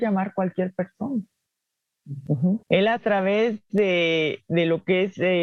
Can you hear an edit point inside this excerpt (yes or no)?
yes